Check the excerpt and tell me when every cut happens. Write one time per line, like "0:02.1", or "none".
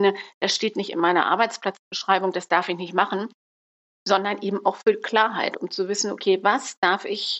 none